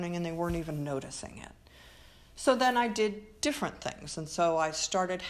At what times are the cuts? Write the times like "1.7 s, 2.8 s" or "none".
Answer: none